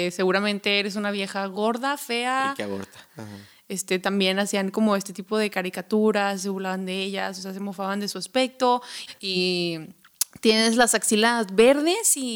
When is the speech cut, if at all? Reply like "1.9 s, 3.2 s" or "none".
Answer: 3.1 s, 9.1 s